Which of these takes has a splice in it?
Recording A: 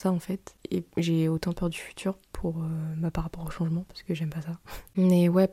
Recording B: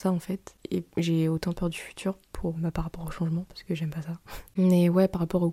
B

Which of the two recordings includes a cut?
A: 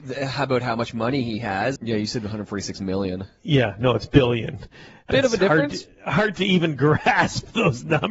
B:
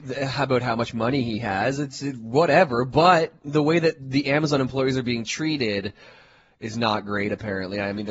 A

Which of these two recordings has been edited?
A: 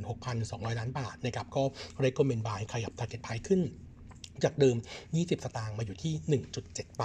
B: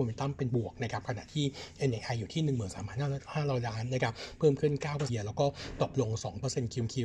B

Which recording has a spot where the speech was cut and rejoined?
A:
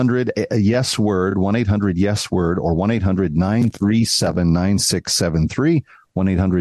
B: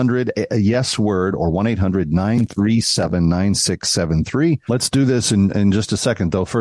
B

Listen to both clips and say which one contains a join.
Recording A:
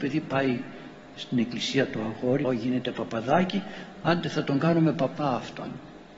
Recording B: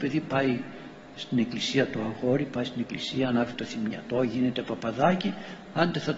A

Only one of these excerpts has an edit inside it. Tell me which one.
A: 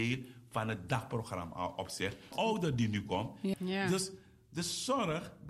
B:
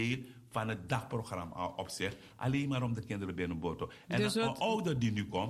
A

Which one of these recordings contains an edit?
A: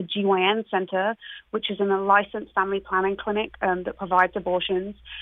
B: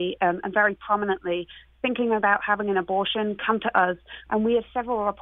B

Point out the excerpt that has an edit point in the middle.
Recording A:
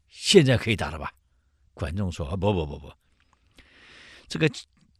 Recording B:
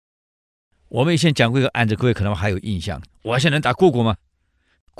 B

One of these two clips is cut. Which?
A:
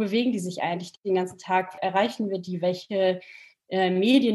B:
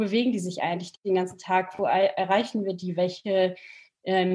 A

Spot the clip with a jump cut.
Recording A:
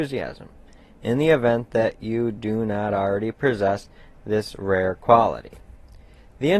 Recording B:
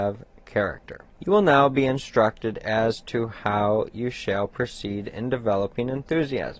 B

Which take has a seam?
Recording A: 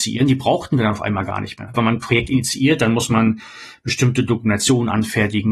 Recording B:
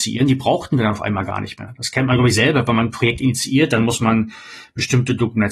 A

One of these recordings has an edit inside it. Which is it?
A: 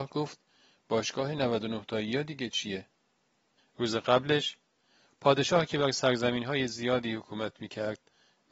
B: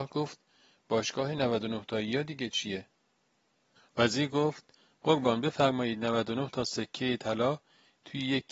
A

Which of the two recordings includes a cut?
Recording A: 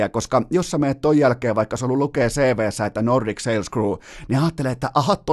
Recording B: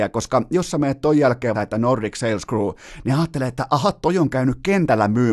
B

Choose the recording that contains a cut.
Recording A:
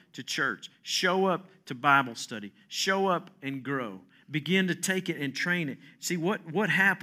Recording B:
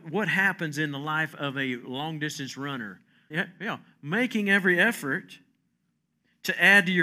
B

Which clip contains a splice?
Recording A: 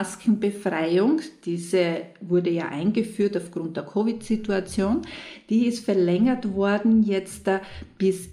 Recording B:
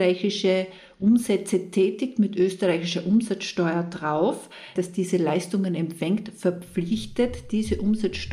B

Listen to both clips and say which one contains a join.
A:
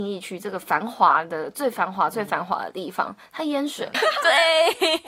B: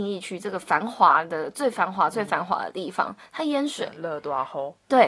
A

